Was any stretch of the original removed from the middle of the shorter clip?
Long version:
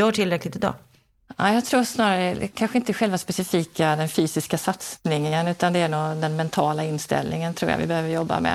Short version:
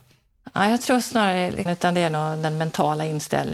yes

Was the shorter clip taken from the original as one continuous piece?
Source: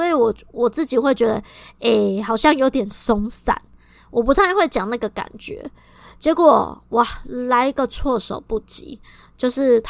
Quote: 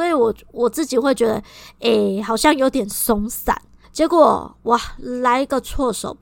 no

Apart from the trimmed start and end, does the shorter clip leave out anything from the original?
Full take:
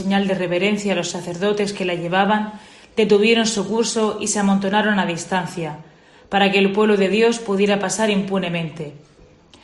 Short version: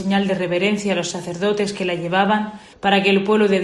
yes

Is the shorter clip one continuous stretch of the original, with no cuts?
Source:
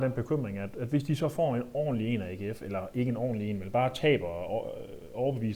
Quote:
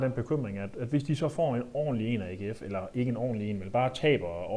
yes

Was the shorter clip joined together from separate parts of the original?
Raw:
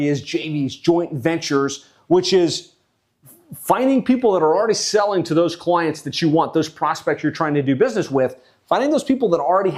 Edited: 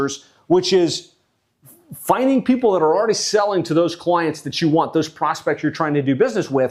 no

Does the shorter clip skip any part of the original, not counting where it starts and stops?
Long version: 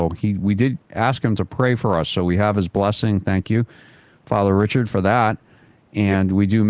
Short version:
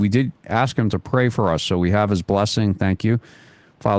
no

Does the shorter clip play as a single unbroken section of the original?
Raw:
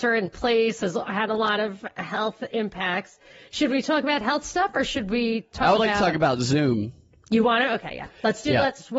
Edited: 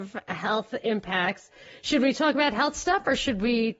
yes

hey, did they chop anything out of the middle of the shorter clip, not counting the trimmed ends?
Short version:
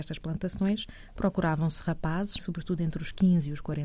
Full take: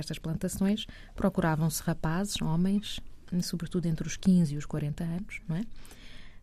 yes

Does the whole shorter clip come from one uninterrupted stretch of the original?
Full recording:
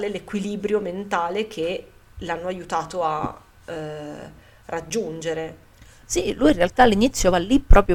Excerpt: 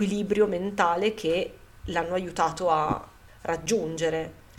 no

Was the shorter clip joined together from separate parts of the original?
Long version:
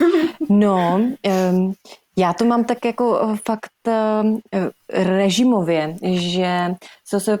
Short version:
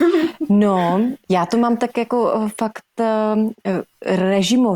yes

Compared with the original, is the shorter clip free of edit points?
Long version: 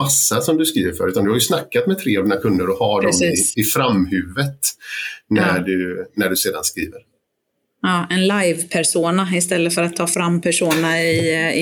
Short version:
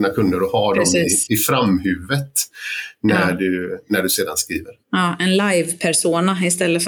no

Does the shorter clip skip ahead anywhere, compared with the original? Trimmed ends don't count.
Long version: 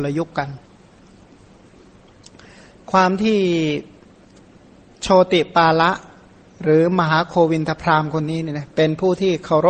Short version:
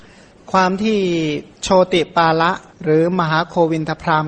yes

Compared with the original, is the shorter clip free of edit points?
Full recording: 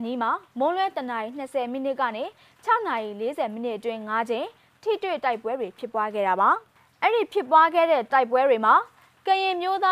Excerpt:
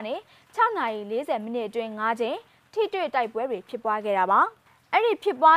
yes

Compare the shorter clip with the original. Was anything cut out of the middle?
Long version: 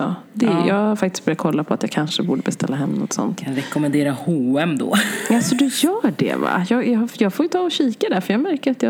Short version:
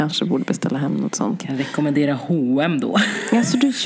no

